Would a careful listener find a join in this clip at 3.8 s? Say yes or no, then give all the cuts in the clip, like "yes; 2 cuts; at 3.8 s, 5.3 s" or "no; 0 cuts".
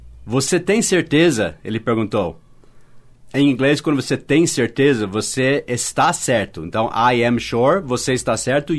no; 0 cuts